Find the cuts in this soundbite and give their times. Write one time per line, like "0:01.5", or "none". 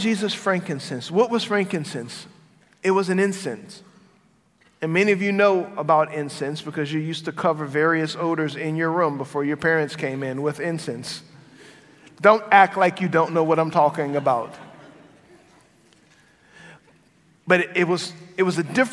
none